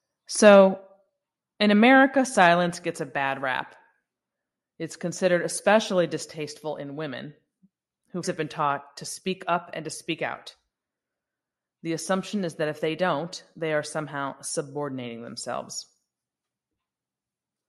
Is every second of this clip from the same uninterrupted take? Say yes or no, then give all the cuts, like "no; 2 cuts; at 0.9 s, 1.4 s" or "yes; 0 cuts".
no; 1 cut; at 8.2 s